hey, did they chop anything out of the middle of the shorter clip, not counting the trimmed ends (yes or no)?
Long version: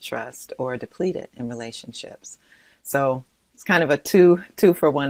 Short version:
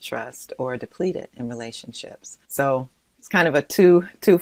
yes